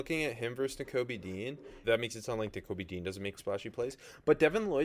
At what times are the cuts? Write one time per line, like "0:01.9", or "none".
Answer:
0:01.8
0:03.4